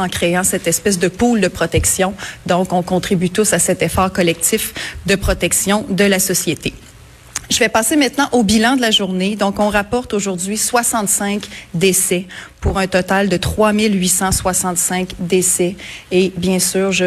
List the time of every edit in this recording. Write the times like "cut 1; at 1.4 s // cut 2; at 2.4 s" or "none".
none